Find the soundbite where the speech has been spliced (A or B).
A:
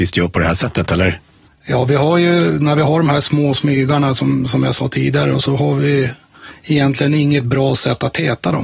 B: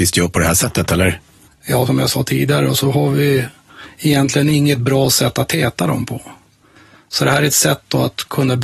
B